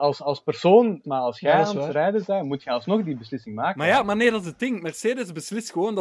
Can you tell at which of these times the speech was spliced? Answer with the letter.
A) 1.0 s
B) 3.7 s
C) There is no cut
A